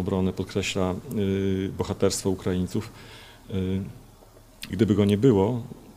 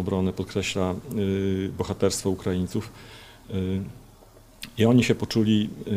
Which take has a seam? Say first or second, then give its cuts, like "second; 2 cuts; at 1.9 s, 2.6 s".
first; 1 cut; at 4.7 s